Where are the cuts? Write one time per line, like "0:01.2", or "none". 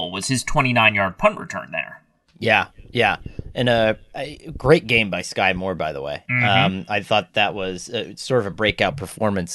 none